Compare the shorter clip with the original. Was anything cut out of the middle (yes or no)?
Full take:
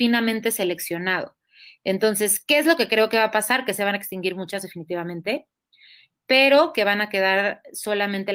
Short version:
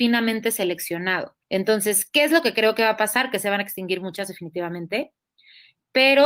yes